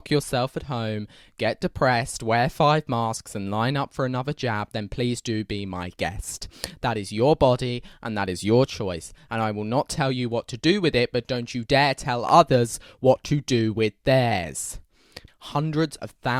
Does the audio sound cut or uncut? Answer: cut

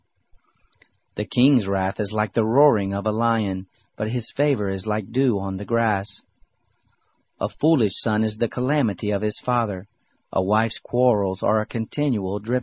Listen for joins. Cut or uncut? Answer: uncut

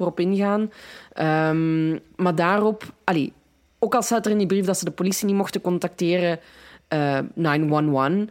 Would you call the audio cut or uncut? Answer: cut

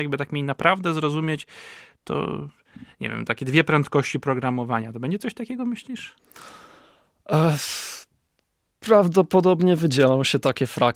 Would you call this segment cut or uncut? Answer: uncut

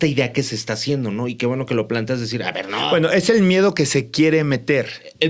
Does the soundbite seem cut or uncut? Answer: uncut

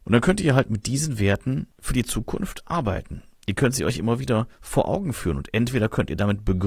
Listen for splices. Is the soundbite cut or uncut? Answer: uncut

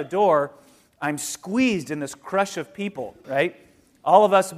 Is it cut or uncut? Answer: cut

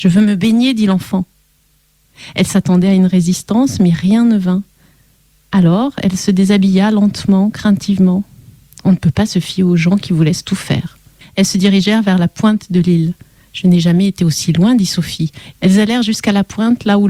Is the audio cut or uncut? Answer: cut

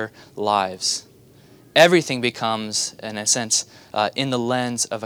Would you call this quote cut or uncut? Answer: uncut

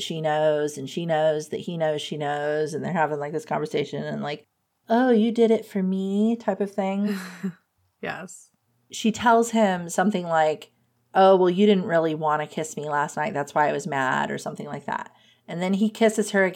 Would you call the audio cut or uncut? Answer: uncut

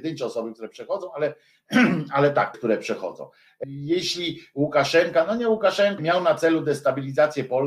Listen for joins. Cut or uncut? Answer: cut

